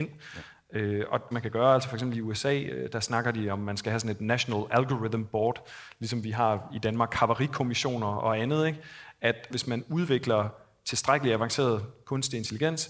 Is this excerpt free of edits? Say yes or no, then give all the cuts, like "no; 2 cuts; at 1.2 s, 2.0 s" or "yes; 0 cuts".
no; 2 cuts; at 1.3 s, 9.5 s